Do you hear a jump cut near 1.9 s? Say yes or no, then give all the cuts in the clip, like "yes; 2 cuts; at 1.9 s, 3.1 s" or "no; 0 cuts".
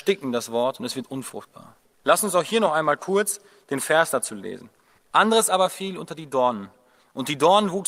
yes; 2 cuts; at 1.9 s, 5.0 s